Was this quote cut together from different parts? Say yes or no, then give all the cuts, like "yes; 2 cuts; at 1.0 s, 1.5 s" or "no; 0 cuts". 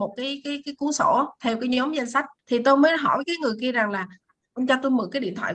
yes; 1 cut; at 2.4 s